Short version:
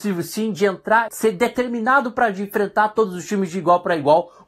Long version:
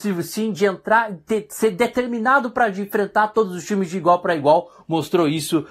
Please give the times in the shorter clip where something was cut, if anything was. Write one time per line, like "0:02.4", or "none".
0:01.1